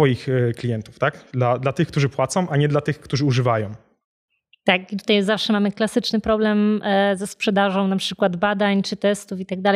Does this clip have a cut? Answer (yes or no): no